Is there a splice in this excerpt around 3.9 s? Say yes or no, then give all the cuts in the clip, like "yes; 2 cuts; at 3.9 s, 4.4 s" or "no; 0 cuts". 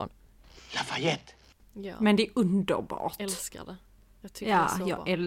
no; 1 cut; at 1.6 s